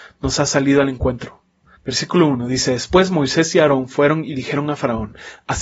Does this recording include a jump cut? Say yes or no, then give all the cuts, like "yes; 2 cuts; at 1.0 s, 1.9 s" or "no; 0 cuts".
yes; 1 cut; at 1.7 s